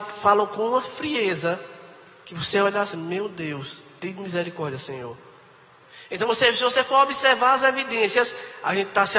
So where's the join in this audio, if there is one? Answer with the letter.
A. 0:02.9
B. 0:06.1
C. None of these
A